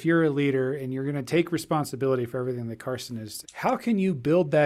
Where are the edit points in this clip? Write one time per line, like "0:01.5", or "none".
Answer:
0:03.4